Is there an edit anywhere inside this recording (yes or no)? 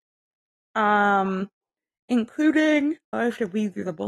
yes